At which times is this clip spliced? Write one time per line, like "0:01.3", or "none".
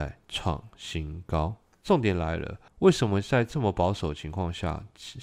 none

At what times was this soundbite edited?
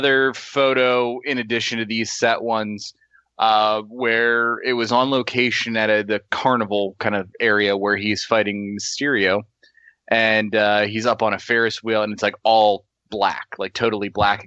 none

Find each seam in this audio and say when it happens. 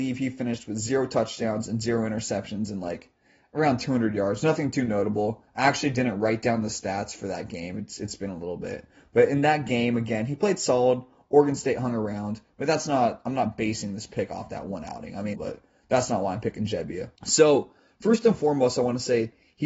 0:15.3
0:17.2

